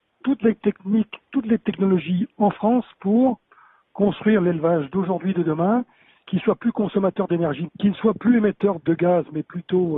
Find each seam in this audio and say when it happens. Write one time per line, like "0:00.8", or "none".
0:07.7
0:08.8